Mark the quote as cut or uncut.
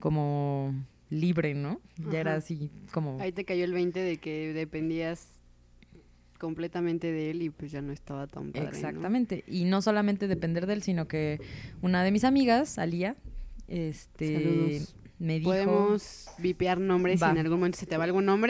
uncut